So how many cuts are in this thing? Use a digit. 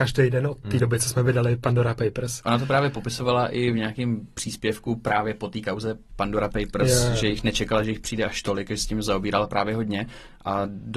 0